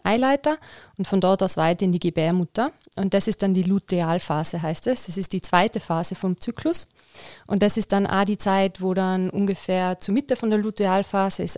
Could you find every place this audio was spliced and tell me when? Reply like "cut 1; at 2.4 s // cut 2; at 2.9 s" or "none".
none

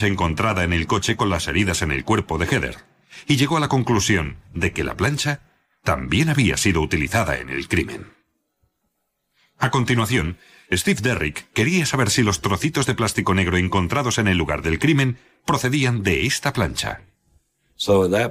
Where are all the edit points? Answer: none

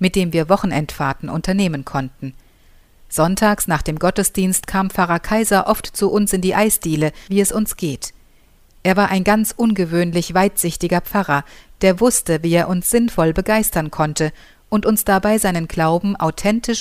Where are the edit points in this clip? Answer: cut 1; at 7.3 s

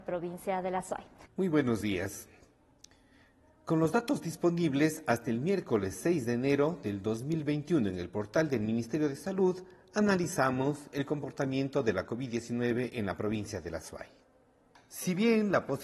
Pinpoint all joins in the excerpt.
cut 1; at 1.3 s

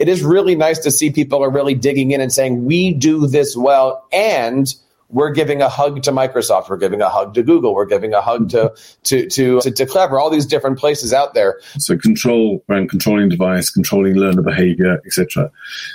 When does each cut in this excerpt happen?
cut 1; at 9.6 s // cut 2; at 11.7 s

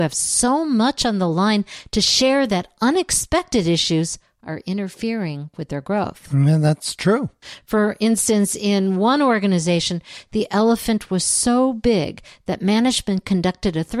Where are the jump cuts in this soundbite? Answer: none

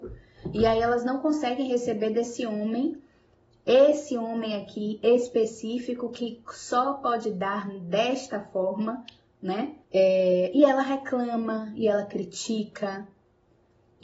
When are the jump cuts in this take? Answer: cut 1; at 9.8 s

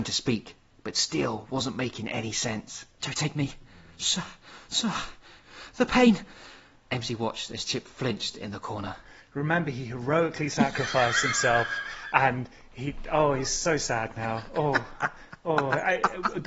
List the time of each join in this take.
cut 1; at 3.0 s

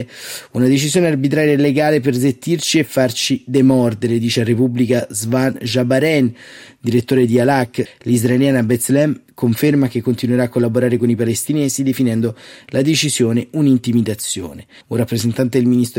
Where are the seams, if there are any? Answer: cut 1; at 7.9 s // cut 2; at 14.8 s

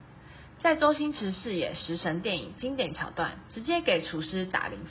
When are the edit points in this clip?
cut 1; at 3.5 s

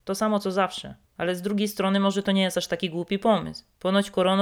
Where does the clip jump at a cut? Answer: cut 1; at 1.1 s

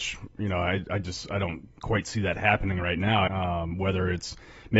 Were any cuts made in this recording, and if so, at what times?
cut 1; at 3.3 s

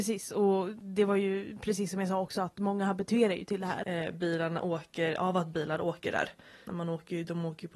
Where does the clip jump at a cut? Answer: cut 1; at 3.8 s // cut 2; at 5.2 s // cut 3; at 6.7 s

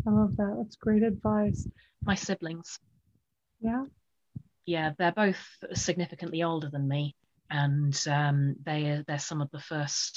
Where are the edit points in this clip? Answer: cut 1; at 1.9 s

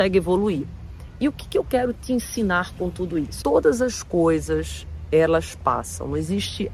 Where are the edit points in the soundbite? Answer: cut 1; at 3.4 s

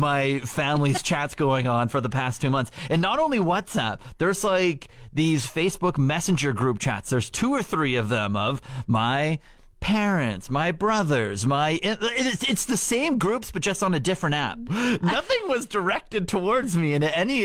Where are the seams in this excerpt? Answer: cut 1; at 14.7 s

